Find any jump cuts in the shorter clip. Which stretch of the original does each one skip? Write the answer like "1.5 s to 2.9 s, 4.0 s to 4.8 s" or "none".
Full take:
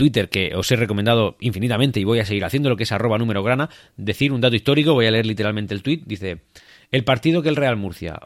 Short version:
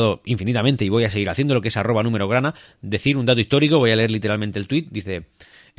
none